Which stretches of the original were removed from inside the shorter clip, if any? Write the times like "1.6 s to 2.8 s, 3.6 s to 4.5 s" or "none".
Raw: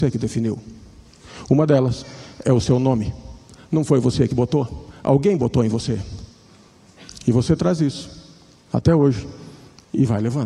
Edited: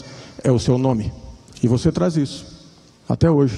3.6 s to 7.2 s